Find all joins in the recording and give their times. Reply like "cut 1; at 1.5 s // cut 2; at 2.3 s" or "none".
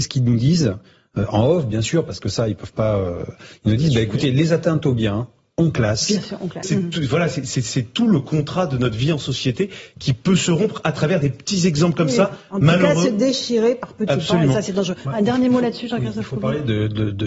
cut 1; at 6.6 s